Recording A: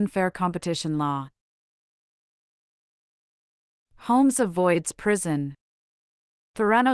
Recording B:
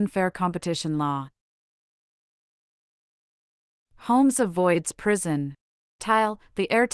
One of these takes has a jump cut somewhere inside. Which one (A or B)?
B